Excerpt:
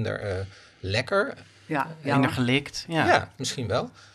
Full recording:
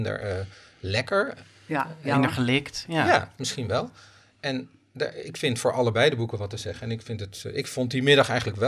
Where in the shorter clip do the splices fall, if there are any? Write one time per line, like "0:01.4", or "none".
none